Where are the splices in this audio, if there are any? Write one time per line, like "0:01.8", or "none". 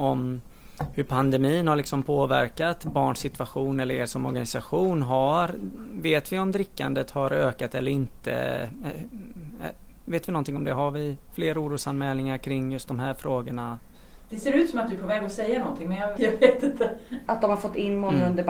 0:14.3
0:16.2
0:17.3